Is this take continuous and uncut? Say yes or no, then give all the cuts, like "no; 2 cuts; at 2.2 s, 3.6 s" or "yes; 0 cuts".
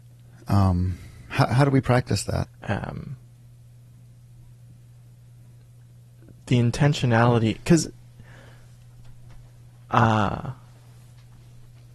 no; 1 cut; at 2.4 s